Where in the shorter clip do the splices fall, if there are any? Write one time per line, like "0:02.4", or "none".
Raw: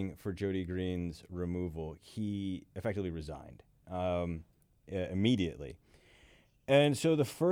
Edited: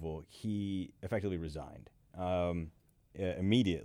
none